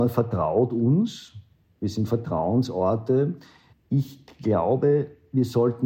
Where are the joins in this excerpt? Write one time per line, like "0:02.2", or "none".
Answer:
0:03.7